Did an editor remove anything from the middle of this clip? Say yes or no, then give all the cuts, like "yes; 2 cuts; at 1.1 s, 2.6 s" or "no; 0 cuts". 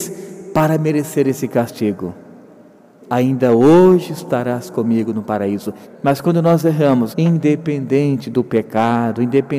yes; 3 cuts; at 3.0 s, 5.8 s, 7.1 s